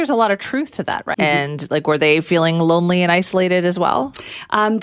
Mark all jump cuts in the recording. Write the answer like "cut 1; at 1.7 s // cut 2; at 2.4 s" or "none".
cut 1; at 1.1 s